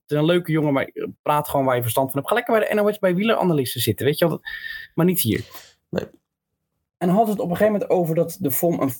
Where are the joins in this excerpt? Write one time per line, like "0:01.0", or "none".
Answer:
none